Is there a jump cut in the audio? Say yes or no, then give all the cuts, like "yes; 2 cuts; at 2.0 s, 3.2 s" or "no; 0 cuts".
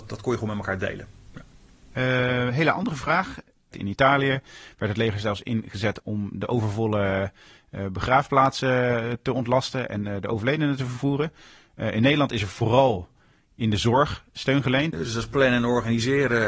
yes; 3 cuts; at 3.7 s, 6.0 s, 14.9 s